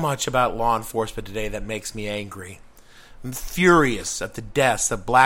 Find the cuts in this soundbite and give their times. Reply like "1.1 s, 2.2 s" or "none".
none